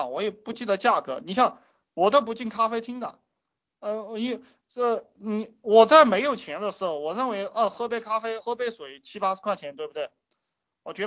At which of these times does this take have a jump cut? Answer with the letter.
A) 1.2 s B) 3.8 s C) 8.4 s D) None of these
C